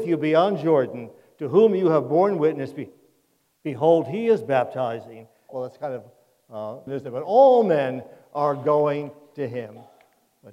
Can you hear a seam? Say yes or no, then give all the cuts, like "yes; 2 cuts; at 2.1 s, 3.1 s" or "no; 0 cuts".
yes; 2 cuts; at 5.5 s, 6.9 s